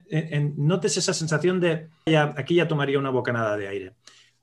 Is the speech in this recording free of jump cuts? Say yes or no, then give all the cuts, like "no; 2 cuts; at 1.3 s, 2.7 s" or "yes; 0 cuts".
no; 1 cut; at 2.1 s